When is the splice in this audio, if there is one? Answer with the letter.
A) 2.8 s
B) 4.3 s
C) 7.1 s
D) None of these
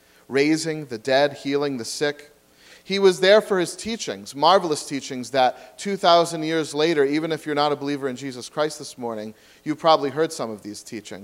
D